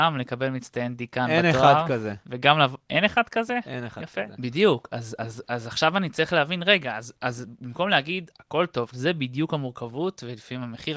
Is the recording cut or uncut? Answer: cut